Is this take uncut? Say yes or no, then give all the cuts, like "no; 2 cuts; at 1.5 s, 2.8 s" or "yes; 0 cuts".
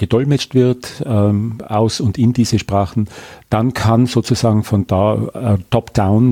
yes; 0 cuts